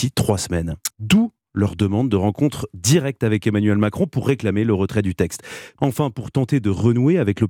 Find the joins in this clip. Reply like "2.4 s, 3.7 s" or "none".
0.9 s, 5.8 s